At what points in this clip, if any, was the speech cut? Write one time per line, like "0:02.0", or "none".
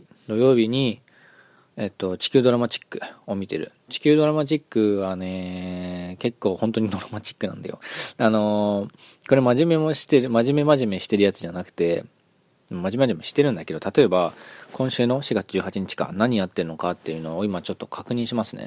none